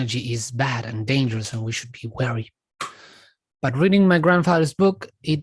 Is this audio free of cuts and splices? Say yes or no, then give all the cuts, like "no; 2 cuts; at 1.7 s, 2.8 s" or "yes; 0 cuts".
yes; 0 cuts